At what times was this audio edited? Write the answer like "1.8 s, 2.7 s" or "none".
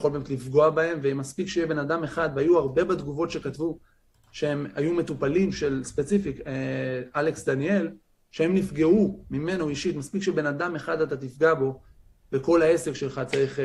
none

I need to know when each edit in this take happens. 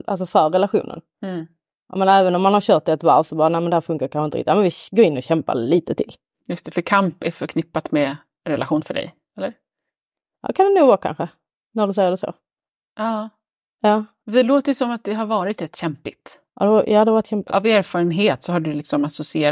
6.4 s

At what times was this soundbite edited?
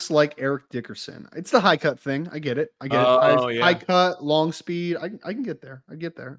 none

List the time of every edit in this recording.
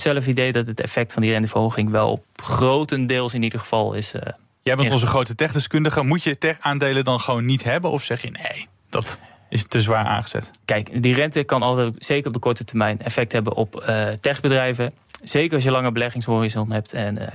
none

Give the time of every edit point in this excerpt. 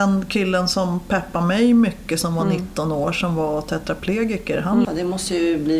4.8 s

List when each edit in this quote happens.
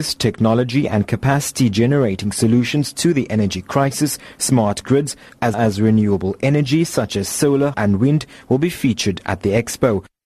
5.5 s, 7.7 s

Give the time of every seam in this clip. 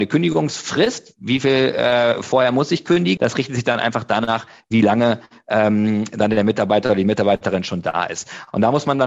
3.2 s

